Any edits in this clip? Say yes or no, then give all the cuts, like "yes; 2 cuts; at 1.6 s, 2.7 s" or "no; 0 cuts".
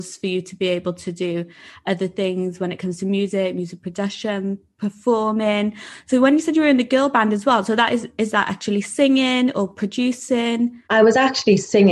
yes; 1 cut; at 10.8 s